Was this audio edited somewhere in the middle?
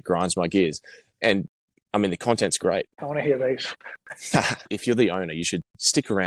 yes; 2 cuts; at 3.0 s, 4.7 s

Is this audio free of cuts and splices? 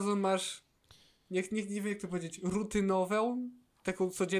yes; 0 cuts

